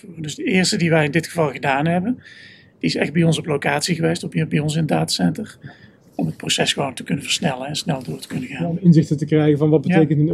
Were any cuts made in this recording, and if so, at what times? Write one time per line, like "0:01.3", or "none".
none